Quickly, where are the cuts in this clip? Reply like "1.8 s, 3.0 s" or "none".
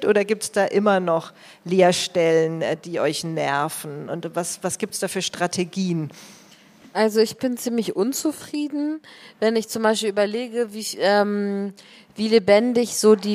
none